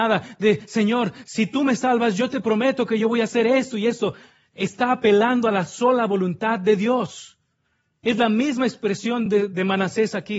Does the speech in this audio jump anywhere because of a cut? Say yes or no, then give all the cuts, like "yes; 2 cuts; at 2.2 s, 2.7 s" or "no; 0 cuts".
no; 0 cuts